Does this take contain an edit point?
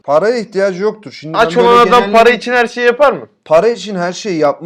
no; 0 cuts

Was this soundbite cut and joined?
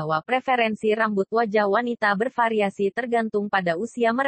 no; 0 cuts

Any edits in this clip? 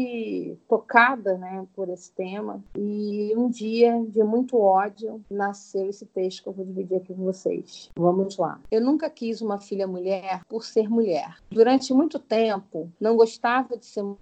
no; 0 cuts

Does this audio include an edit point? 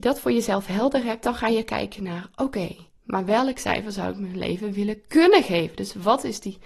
no; 0 cuts

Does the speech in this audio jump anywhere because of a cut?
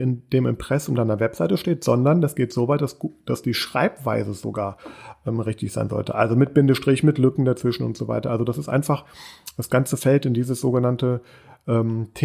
no; 0 cuts

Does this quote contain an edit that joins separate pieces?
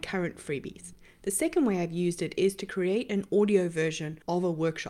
no; 0 cuts

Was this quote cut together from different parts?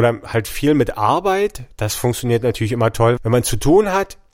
yes; 1 cut; at 3.2 s

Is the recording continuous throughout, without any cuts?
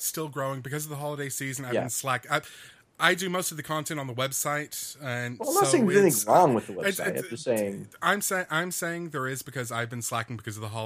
yes; 0 cuts

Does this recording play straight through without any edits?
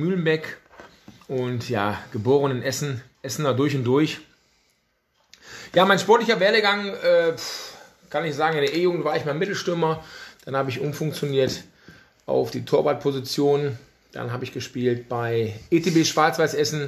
yes; 0 cuts

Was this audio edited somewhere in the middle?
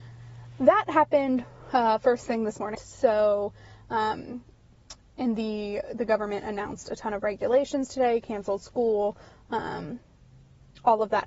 yes; 1 cut; at 2.7 s

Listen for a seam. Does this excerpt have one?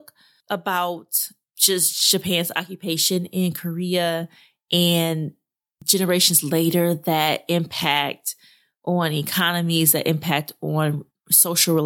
no; 0 cuts

